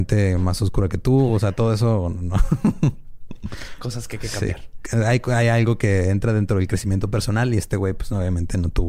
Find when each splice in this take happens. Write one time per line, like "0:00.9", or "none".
none